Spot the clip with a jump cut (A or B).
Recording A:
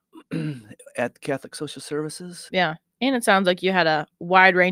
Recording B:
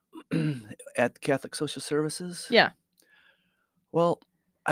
A